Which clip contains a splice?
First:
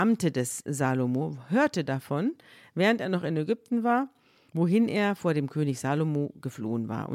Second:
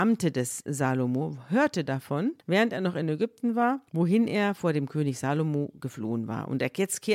second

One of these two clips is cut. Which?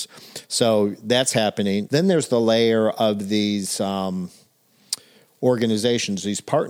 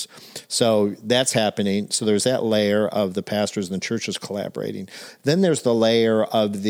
first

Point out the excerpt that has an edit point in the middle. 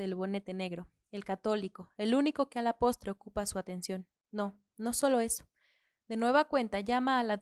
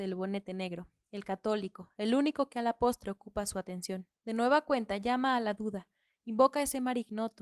second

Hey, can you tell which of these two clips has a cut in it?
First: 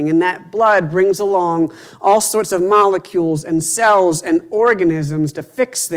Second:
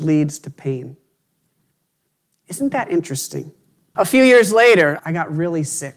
second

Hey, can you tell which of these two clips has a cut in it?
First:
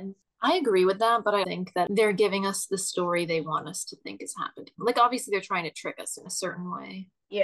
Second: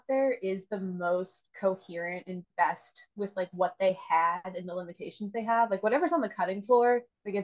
first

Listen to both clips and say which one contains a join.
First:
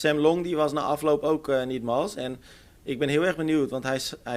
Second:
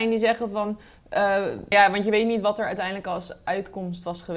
second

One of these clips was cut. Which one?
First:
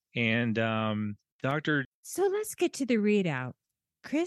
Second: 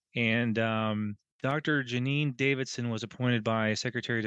first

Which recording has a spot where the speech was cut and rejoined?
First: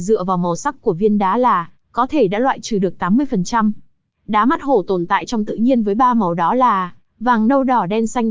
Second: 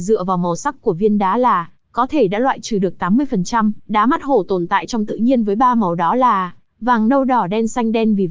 second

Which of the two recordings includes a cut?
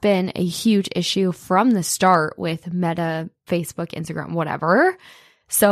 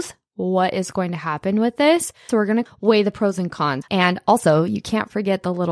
second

